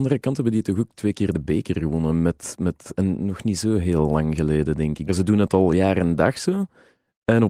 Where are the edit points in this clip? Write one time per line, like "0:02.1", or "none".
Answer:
0:05.1